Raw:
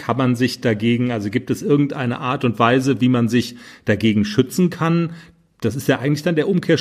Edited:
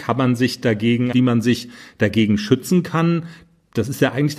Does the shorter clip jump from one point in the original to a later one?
yes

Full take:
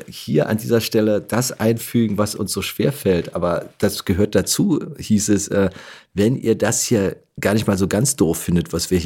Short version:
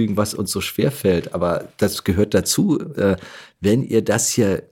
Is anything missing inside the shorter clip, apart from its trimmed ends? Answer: yes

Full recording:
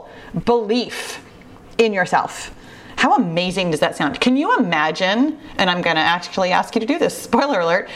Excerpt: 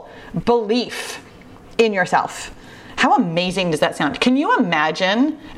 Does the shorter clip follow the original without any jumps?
yes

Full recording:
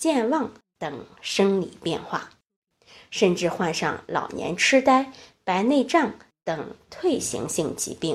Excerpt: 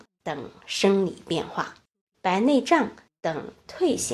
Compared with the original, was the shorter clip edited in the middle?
yes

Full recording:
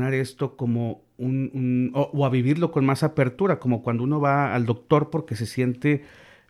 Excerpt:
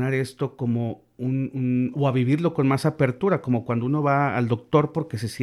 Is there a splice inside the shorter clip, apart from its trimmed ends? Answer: yes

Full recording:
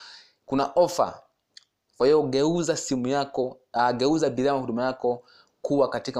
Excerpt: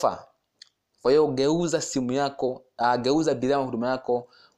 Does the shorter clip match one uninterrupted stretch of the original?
yes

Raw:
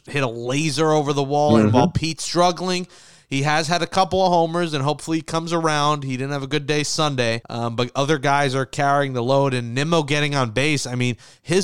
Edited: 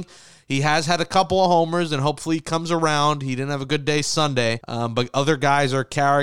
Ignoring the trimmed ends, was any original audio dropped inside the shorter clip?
no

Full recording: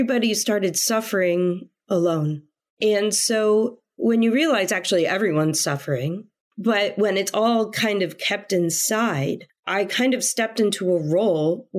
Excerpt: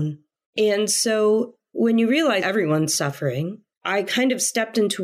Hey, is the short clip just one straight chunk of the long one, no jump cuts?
no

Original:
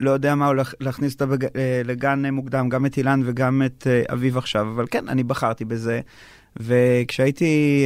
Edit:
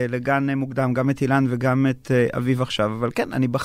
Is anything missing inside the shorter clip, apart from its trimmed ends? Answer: no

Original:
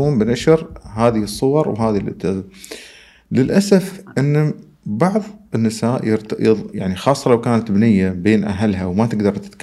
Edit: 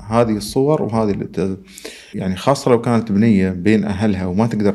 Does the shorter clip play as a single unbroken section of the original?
no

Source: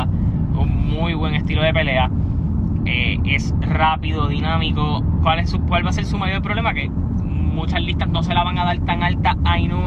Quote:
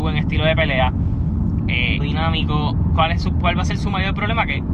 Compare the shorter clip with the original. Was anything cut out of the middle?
yes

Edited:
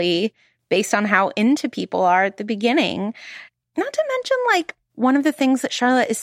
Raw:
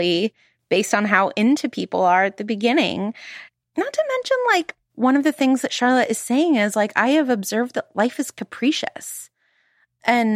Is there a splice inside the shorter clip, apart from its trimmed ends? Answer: no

